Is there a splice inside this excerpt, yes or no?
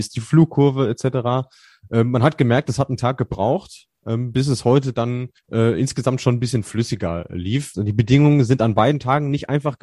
yes